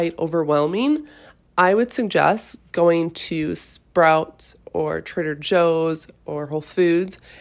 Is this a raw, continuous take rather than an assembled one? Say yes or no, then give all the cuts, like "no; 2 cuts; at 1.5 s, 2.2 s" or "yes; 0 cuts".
yes; 0 cuts